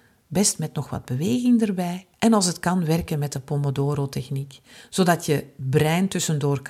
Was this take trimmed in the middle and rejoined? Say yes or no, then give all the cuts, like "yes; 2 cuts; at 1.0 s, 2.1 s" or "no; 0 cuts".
yes; 1 cut; at 2.1 s